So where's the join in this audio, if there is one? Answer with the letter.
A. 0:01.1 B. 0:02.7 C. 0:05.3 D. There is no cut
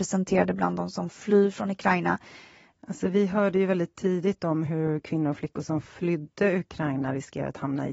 B